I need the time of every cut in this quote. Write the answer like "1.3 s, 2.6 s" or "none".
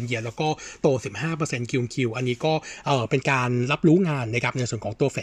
none